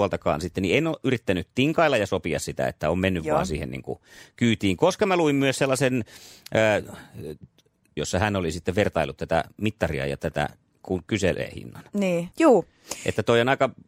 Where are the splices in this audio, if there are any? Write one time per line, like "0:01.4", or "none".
0:08.0
0:12.3